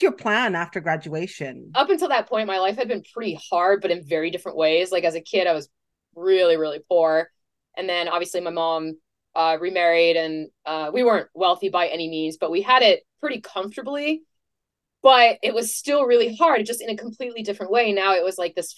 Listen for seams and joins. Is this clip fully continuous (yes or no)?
yes